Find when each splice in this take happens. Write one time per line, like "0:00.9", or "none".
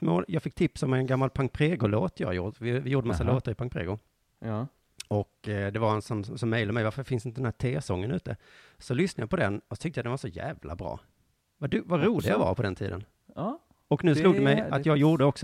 none